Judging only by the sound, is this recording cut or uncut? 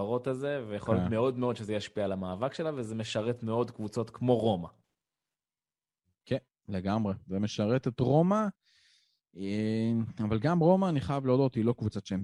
uncut